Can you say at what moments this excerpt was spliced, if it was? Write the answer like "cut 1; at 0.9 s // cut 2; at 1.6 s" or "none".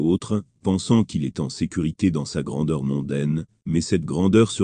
none

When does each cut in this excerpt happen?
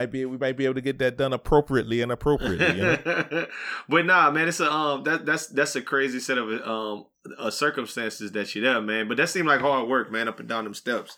none

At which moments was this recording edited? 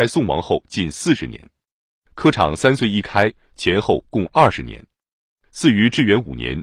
cut 1; at 3.5 s

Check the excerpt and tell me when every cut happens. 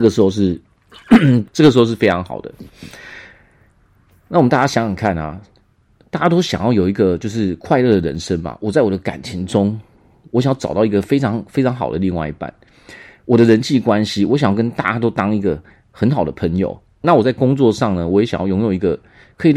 cut 1; at 1.5 s // cut 2; at 17.0 s

